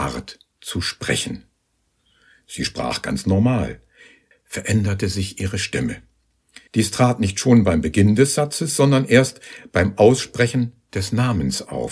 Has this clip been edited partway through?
yes; 2 cuts; at 4.3 s, 6.7 s

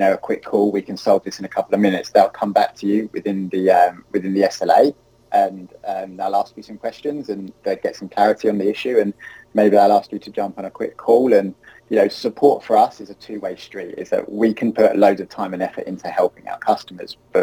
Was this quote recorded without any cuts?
yes; 0 cuts

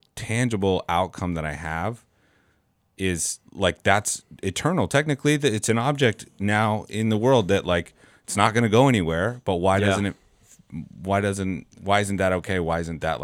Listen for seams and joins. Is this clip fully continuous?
no; 2 cuts; at 3.5 s, 11.7 s

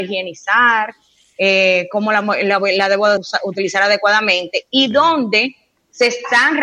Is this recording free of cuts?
no; 1 cut; at 3.2 s

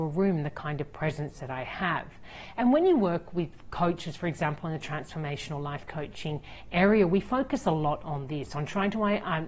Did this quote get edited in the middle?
no; 0 cuts

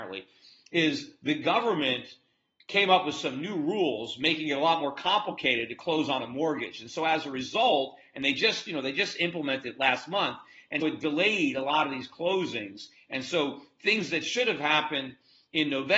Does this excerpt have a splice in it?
yes; 1 cut; at 10.8 s

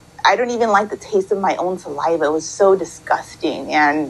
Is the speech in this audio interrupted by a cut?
no; 0 cuts

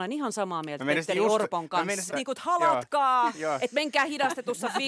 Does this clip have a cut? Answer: yes; 1 cut; at 2.1 s

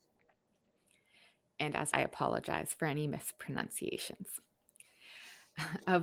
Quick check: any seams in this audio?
yes; 1 cut; at 1.9 s

